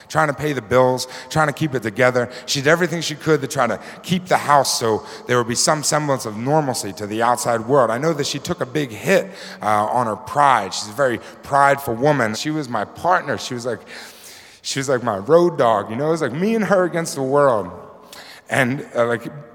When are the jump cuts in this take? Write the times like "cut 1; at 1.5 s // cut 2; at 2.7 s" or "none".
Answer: cut 1; at 12.3 s